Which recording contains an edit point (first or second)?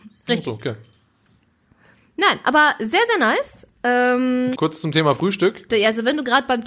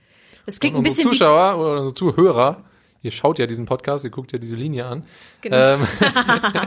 first